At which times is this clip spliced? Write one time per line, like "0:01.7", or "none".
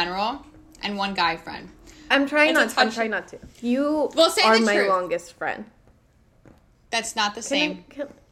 0:02.1
0:03.5

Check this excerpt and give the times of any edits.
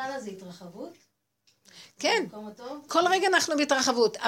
0:02.9

